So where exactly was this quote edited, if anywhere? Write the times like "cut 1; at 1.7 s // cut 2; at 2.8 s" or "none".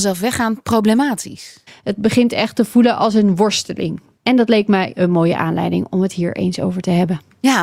cut 1; at 1.7 s // cut 2; at 4.2 s